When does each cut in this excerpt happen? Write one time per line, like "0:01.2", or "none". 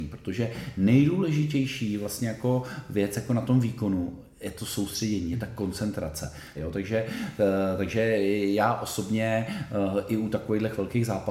0:06.6